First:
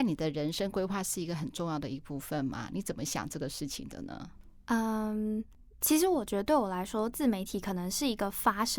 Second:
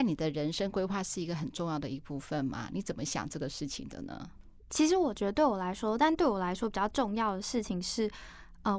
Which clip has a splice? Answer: second; 2 cuts; at 4.6 s, 6.0 s

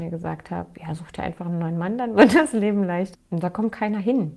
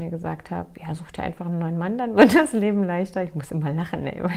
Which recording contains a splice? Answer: first; 1 cut; at 3.1 s

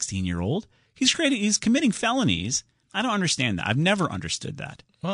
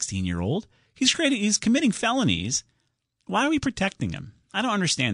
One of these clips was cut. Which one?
first; 1 cut; at 2.8 s

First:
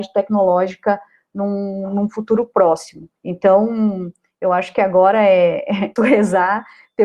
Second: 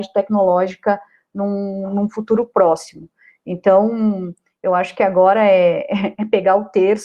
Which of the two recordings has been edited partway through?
first; 2 cuts; at 3.2 s, 6.0 s

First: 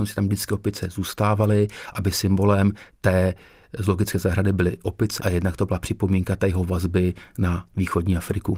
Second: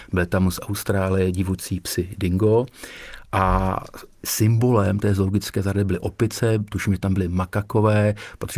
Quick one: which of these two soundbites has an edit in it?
first; 1 cut; at 5.2 s

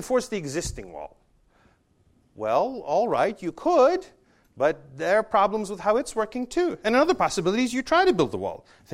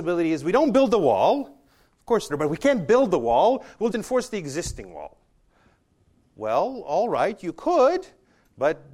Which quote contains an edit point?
second; 2 cuts; at 2.3 s, 3.9 s

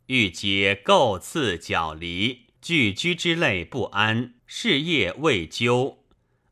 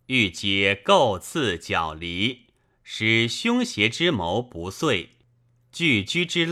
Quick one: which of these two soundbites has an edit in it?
first; 2 cuts; at 2.6 s, 4.4 s

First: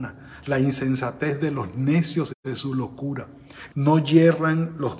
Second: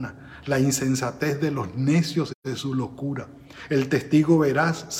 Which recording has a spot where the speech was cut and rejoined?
first; 1 cut; at 3.7 s

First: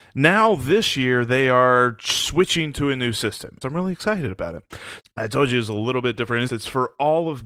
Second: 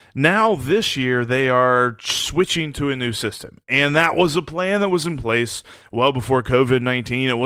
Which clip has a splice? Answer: first; 3 cuts; at 3.6 s, 5.0 s, 6.5 s

